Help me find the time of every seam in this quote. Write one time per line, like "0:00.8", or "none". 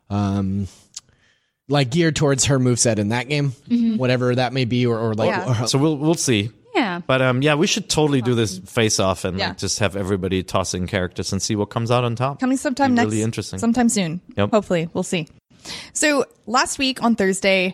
0:05.7